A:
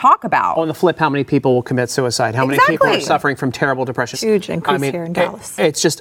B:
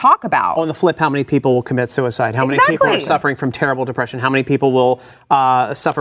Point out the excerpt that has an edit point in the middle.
A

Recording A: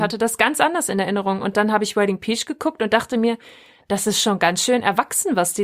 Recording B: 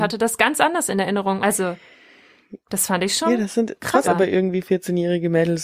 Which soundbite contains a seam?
B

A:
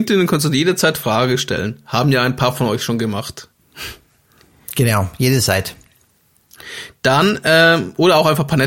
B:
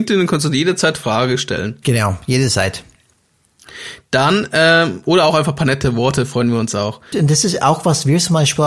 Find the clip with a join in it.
B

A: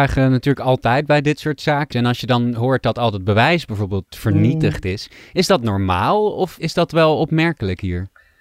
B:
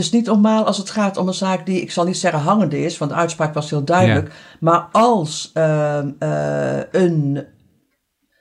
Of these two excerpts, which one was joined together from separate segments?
A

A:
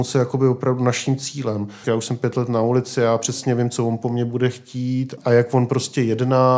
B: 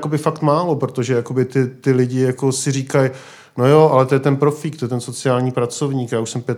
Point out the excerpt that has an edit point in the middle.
A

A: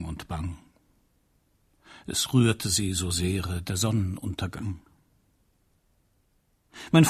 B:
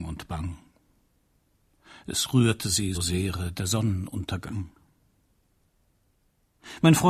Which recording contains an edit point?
B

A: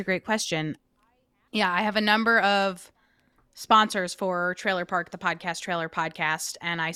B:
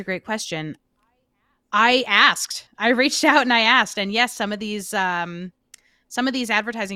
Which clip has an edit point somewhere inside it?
A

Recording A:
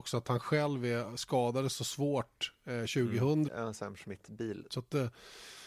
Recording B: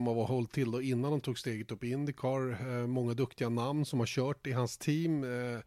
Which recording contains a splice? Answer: A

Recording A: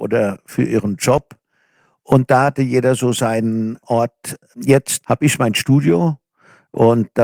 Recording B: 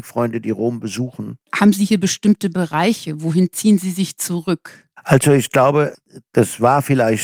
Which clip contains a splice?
A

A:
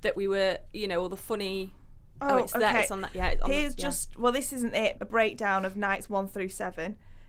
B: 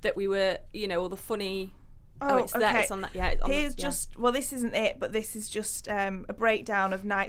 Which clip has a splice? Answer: A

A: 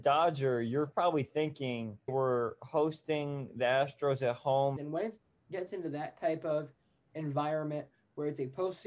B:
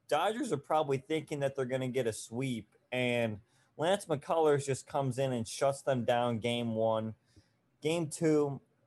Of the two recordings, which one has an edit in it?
A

